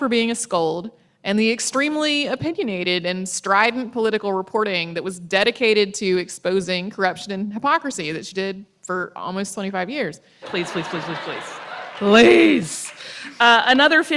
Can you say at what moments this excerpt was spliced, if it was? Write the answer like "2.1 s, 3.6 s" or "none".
10.4 s

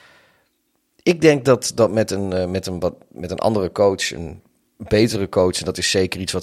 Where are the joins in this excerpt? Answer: 1.7 s

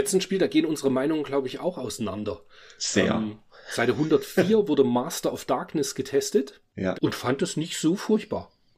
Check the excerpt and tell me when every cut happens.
6.9 s

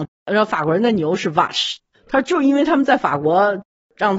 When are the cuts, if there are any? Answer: 1.9 s

